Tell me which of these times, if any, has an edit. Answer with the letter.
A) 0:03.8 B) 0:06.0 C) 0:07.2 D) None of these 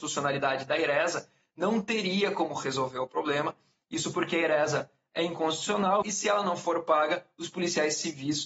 B